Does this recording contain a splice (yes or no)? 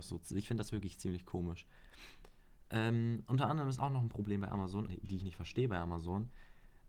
yes